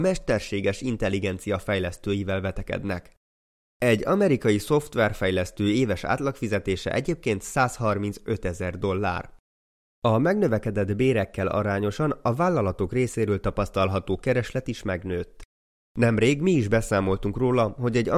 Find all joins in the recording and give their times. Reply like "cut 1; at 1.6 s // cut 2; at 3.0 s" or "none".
none